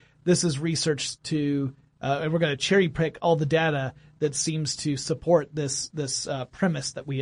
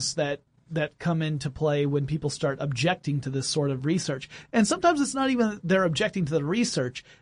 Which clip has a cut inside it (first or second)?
second